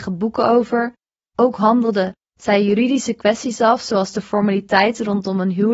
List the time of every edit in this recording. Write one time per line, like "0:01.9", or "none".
none